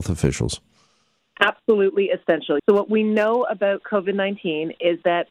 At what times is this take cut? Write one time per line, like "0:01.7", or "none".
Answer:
0:02.6